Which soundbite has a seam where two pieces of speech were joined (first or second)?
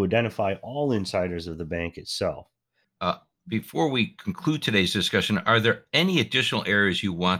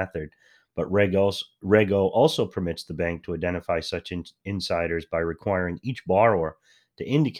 first